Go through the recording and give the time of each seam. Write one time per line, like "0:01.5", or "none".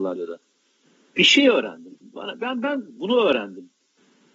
none